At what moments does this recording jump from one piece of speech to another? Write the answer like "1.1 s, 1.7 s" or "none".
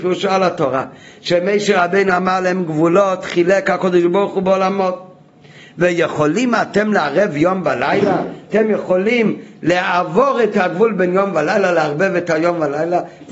none